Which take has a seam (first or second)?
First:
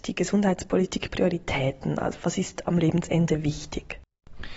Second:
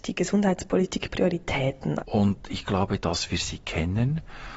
second